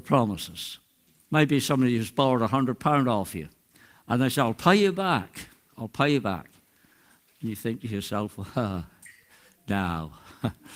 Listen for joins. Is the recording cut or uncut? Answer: cut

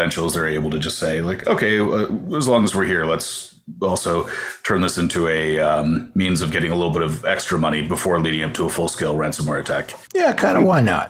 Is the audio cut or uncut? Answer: uncut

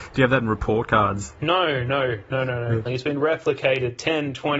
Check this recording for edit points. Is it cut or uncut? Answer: cut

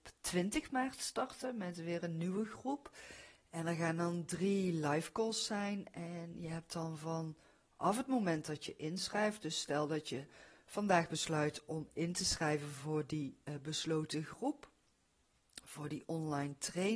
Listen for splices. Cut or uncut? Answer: uncut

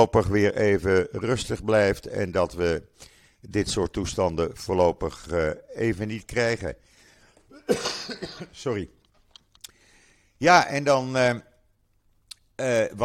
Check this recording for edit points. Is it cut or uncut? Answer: uncut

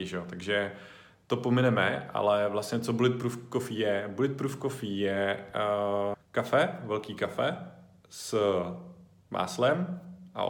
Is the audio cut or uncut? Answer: cut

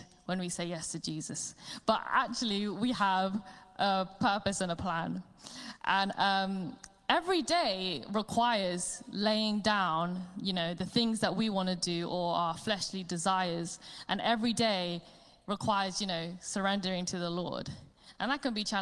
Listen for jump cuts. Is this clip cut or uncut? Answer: uncut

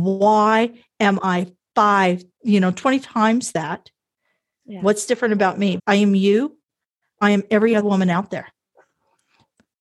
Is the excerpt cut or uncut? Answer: cut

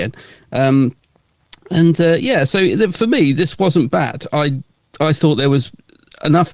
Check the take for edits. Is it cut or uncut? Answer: uncut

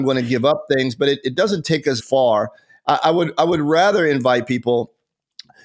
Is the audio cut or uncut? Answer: cut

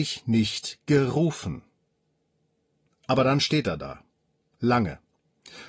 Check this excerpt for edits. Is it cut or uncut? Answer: cut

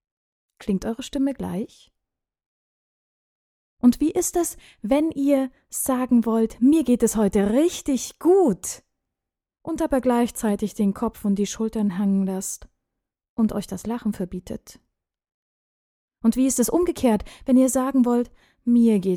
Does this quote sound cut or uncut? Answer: uncut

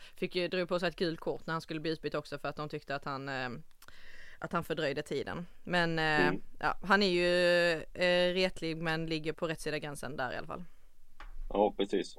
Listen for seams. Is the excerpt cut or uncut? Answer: cut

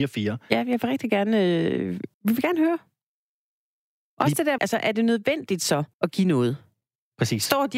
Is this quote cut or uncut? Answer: cut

